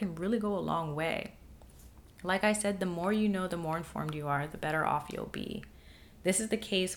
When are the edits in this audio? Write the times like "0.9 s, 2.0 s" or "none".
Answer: none